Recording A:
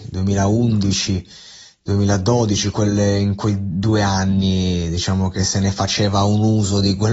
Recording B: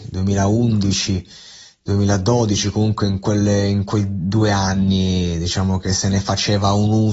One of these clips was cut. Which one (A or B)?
A